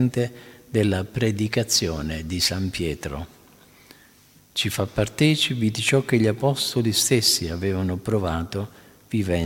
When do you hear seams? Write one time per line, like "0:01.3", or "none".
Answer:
0:04.4